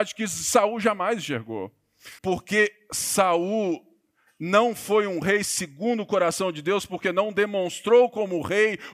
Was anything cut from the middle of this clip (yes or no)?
yes